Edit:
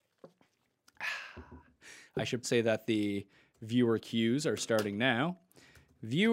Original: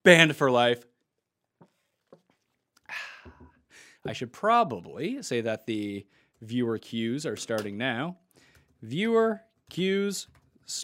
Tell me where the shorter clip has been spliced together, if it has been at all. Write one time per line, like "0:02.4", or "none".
0:02.4